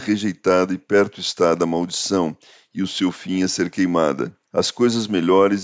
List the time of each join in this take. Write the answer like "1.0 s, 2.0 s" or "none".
4.4 s